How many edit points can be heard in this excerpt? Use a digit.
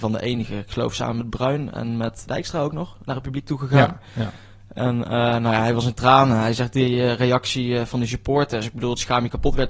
1